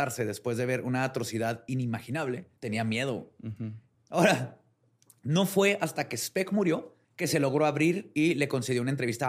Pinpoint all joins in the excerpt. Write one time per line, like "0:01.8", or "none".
0:02.6
0:03.9
0:07.0

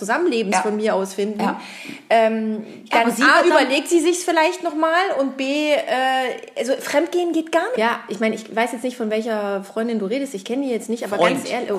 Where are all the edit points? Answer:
0:07.8

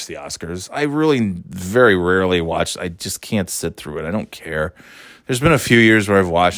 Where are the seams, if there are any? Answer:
none

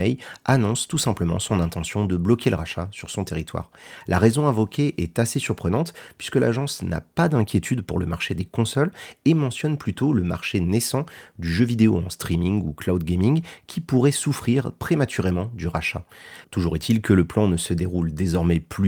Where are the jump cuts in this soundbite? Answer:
0:16.4

